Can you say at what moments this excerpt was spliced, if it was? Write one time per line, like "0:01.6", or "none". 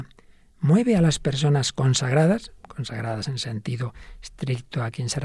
none